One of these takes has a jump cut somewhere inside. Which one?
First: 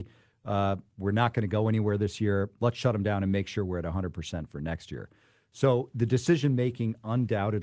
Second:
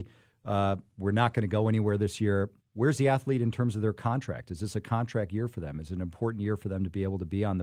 second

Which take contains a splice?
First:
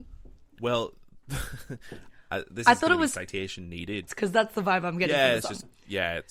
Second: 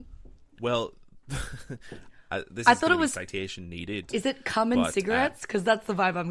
first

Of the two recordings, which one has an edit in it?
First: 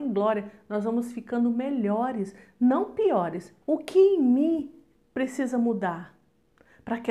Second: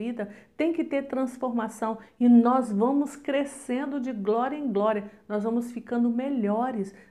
first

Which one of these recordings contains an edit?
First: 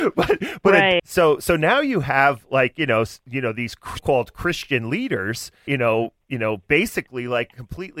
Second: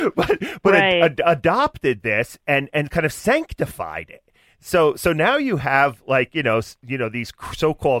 first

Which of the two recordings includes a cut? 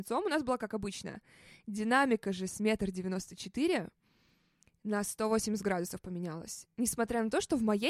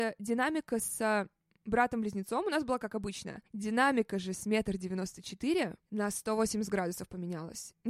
second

